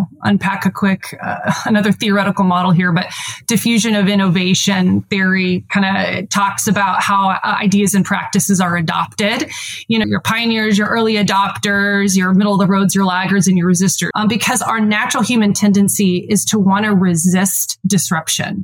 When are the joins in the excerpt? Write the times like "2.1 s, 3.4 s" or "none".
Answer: 10.0 s, 14.1 s